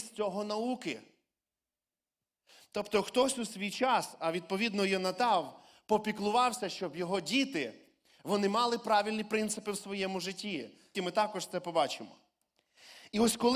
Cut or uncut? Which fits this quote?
cut